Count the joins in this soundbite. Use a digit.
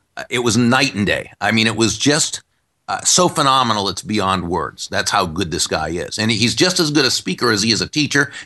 0